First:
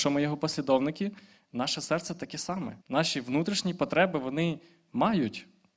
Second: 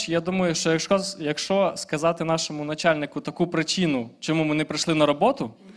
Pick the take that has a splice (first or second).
first